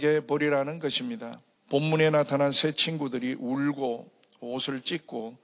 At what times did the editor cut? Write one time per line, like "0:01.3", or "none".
0:01.6